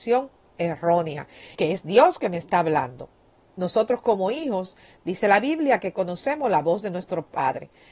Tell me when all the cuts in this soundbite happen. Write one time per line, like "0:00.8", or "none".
0:01.5